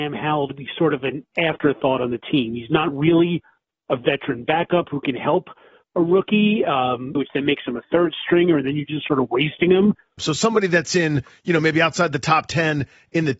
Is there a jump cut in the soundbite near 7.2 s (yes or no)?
yes